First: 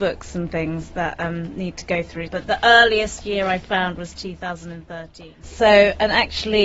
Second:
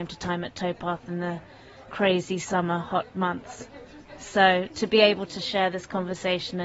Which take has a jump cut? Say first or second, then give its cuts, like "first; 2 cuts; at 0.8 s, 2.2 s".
first; 2 cuts; at 2.3 s, 5.4 s